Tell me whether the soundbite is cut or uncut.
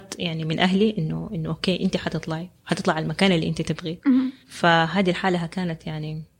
cut